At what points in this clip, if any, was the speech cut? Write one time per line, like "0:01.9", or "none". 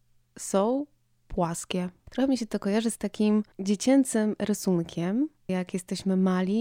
0:03.5
0:05.5